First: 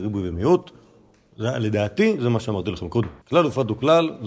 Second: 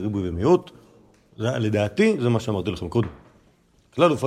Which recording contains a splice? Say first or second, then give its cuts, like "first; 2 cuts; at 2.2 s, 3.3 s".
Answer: first; 1 cut; at 3.2 s